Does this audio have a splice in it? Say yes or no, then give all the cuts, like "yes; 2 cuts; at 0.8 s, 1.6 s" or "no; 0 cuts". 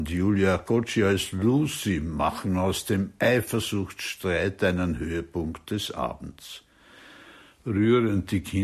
no; 0 cuts